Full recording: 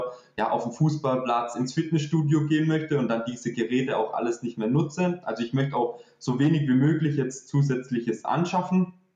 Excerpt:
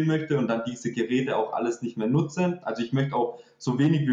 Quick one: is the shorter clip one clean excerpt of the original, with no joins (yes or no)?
yes